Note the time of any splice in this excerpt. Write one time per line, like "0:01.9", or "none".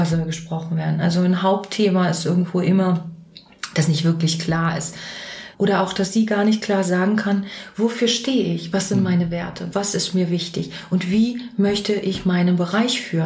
0:05.5